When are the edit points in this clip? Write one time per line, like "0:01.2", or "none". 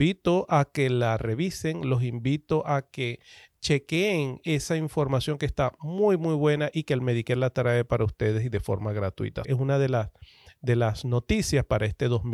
0:09.4